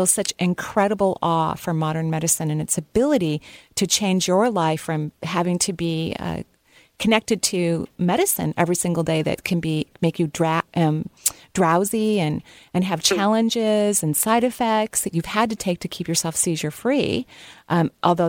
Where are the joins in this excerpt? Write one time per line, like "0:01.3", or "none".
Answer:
none

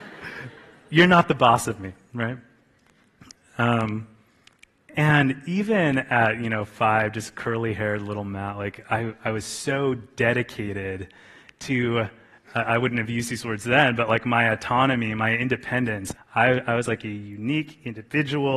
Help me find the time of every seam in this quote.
0:16.2

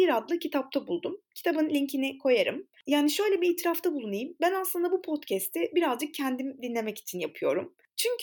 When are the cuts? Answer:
none

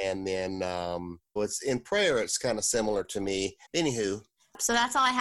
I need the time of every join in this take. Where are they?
0:01.4
0:03.6

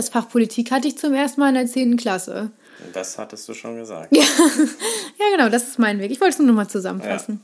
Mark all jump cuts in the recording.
none

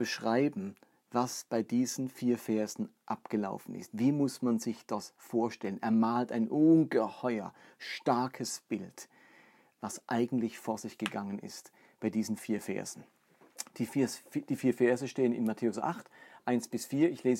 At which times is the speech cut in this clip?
0:03.0
0:09.8

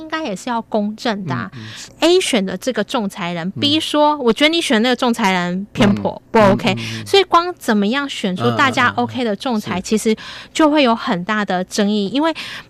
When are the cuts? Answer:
0:01.9

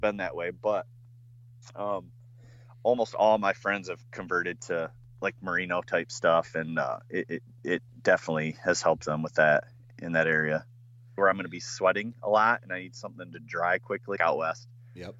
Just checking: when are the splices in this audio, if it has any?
0:11.2
0:14.2

